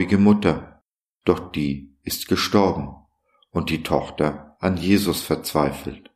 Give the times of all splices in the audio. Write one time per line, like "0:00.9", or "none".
none

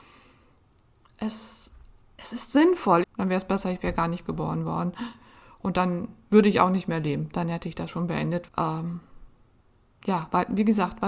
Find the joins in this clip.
0:03.0
0:08.5

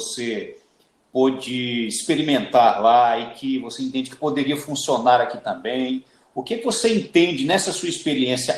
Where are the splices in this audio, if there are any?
0:06.3

